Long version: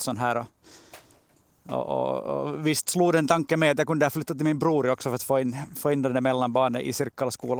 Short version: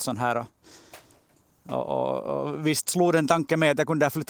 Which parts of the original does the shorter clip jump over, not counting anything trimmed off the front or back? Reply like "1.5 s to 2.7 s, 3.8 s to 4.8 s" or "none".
none